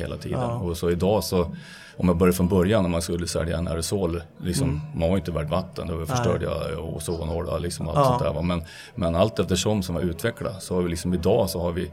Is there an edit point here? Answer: no; 0 cuts

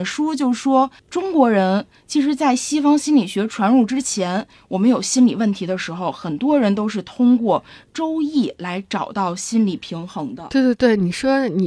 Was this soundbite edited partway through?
no; 0 cuts

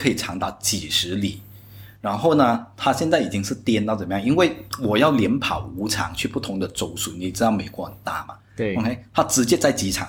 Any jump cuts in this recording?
no; 0 cuts

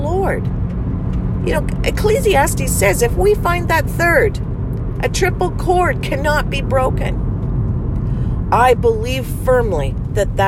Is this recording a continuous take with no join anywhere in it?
yes; 0 cuts

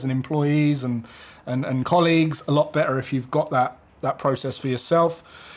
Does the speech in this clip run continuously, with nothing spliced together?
yes; 0 cuts

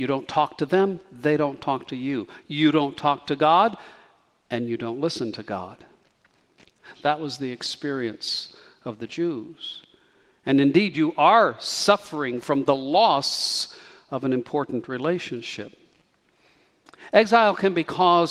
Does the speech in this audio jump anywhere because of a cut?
yes; 1 cut; at 7.0 s

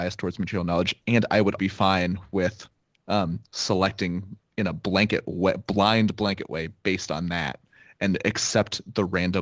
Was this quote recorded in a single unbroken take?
no; 1 cut; at 1.6 s

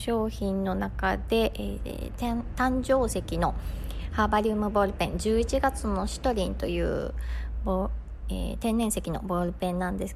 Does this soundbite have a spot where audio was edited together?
no; 0 cuts

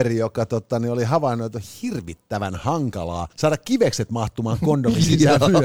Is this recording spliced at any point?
yes; 1 cut; at 3.3 s

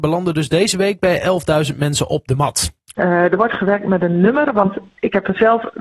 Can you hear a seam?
yes; 1 cut; at 2.9 s

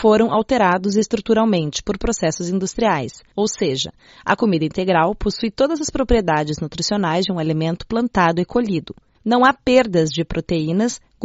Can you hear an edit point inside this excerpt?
no; 0 cuts

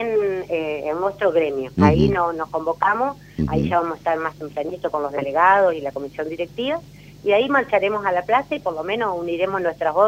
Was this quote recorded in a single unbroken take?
yes; 0 cuts

